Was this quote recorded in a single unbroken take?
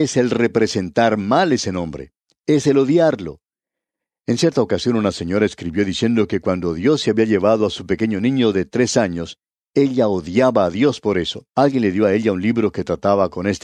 no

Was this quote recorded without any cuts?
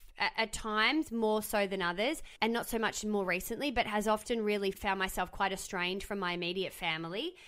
no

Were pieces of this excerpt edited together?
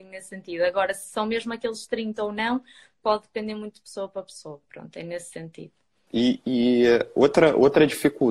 yes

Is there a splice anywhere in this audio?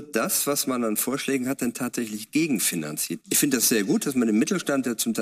yes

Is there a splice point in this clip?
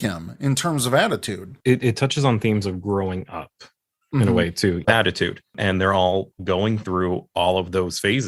yes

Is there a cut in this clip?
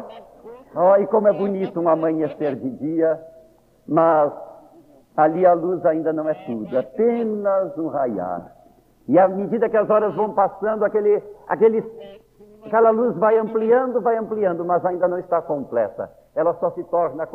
no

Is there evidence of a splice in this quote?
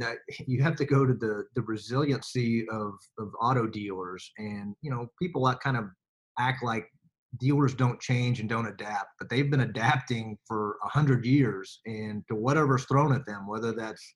no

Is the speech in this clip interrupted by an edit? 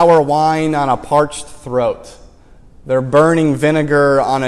no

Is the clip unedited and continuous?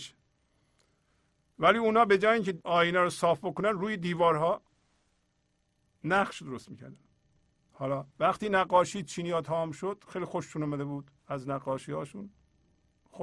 no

